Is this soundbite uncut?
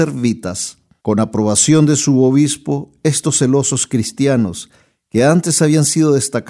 no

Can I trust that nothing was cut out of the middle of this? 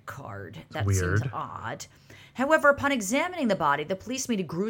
yes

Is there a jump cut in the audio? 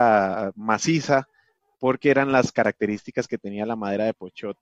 no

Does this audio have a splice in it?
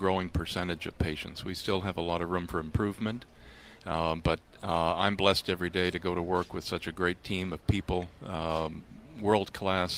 no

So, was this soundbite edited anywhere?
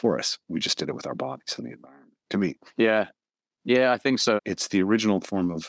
yes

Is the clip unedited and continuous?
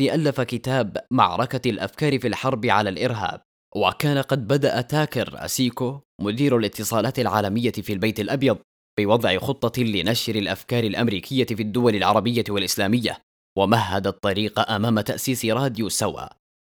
yes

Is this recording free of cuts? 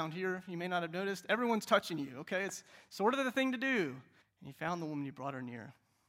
no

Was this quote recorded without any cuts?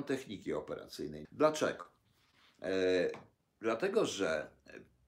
no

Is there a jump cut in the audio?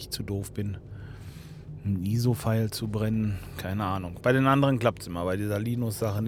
no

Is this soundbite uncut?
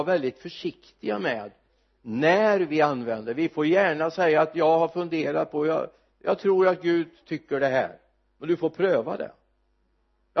yes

